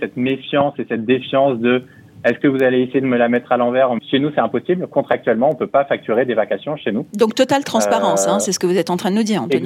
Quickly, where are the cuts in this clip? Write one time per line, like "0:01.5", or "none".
0:04.0